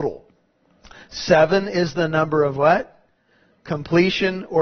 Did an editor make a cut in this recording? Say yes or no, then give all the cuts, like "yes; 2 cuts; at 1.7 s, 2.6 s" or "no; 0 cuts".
no; 0 cuts